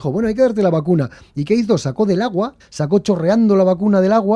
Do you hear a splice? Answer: yes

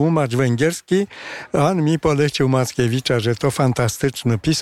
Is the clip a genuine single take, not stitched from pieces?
yes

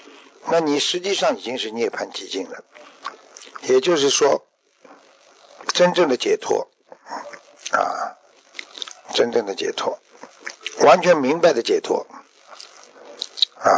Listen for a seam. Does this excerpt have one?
yes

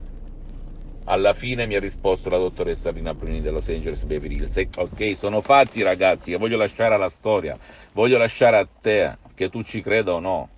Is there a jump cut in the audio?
yes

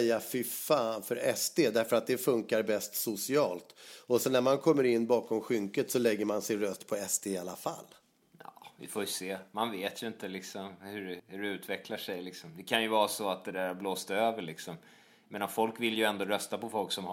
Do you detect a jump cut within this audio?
yes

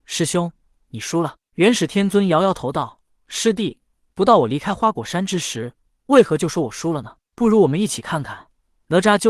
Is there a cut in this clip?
no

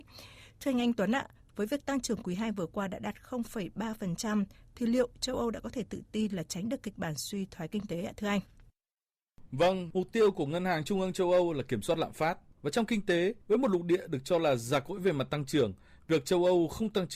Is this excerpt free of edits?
no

